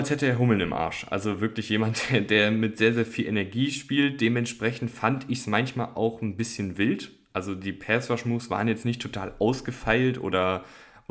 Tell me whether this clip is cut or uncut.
uncut